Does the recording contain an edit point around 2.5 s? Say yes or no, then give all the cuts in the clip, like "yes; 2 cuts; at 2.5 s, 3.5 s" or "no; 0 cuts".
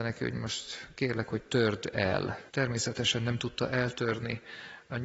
yes; 1 cut; at 2.5 s